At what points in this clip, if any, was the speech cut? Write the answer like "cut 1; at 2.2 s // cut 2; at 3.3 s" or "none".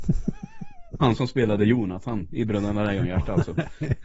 none